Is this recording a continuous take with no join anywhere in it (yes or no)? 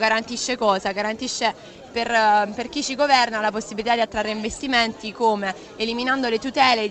yes